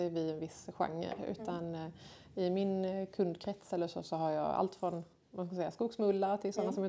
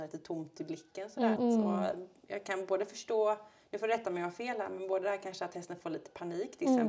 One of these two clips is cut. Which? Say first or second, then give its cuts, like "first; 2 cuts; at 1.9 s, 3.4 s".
second; 1 cut; at 1.4 s